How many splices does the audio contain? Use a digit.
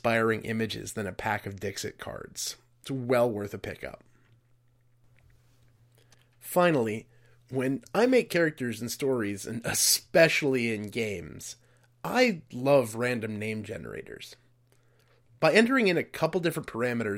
0